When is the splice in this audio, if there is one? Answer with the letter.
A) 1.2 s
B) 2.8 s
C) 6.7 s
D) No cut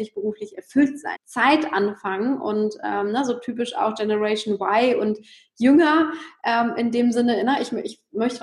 A